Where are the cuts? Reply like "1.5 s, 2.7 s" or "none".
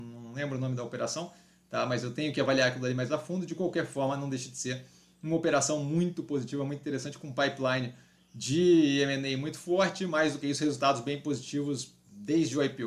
none